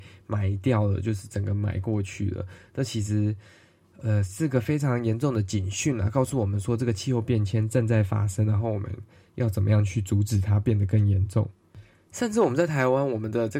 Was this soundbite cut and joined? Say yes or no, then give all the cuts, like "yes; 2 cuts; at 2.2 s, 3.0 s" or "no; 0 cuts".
no; 0 cuts